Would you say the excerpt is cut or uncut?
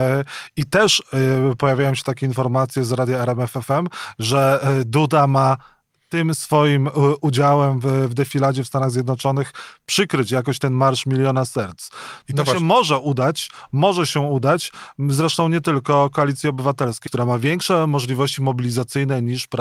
cut